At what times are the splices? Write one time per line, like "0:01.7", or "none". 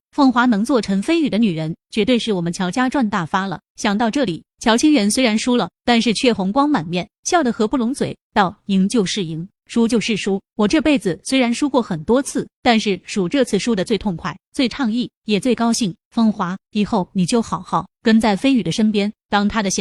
none